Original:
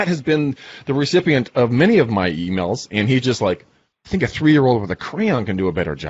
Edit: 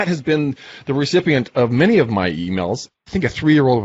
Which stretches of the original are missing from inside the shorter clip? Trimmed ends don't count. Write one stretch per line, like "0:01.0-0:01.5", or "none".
0:02.9-0:03.9